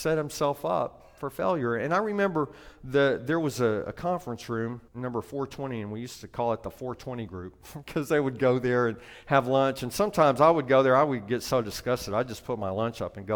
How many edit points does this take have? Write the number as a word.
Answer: one